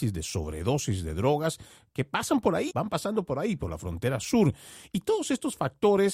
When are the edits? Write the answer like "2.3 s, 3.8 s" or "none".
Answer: 2.7 s